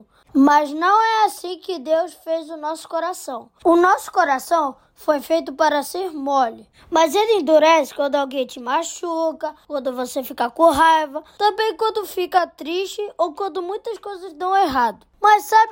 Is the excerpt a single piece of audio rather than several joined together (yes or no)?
yes